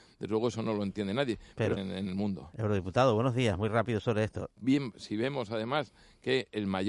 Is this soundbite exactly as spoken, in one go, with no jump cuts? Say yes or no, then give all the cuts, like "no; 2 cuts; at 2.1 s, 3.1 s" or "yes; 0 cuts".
no; 2 cuts; at 1.8 s, 4.5 s